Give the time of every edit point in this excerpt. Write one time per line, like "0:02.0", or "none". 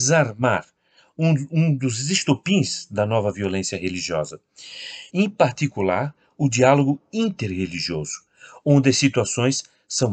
0:05.1